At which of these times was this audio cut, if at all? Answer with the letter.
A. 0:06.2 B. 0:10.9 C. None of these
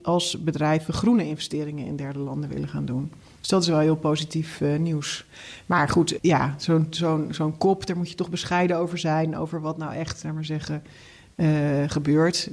A